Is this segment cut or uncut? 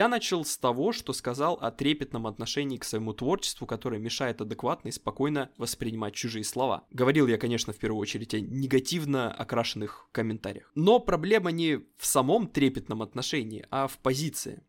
uncut